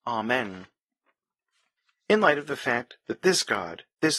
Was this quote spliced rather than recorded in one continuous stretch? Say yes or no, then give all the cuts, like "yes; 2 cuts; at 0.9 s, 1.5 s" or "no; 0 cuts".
no; 0 cuts